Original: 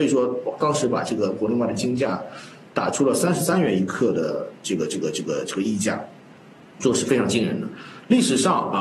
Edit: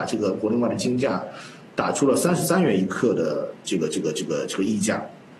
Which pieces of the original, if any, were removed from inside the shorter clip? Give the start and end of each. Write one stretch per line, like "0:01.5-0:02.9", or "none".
none